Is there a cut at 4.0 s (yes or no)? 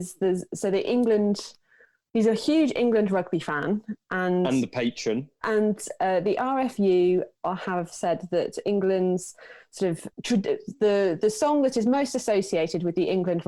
no